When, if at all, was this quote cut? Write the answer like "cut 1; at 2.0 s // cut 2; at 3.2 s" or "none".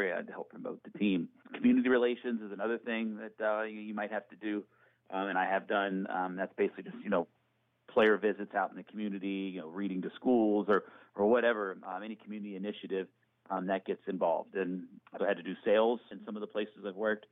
cut 1; at 15.2 s